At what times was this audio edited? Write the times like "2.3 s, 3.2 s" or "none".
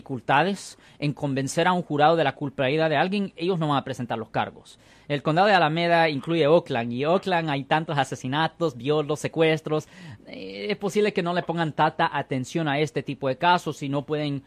none